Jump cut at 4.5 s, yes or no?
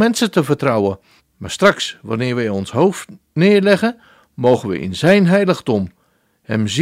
no